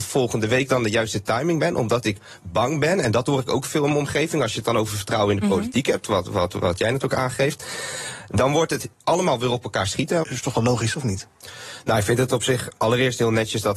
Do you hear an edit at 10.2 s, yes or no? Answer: yes